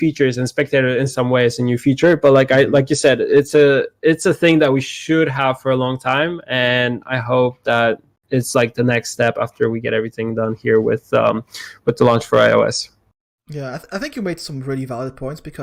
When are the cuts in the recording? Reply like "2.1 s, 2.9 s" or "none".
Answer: none